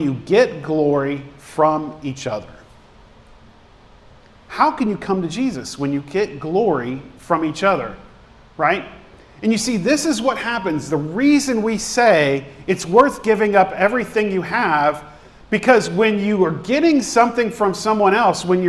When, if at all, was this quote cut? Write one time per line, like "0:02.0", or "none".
none